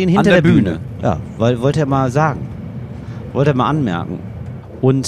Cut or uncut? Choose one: cut